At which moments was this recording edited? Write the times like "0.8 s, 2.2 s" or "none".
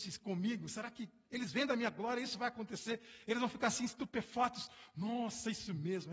none